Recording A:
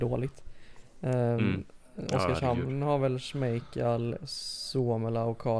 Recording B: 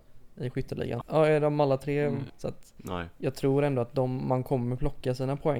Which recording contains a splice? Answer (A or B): B